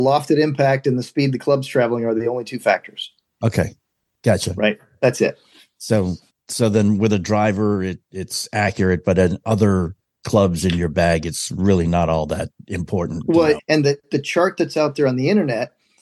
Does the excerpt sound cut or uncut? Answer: cut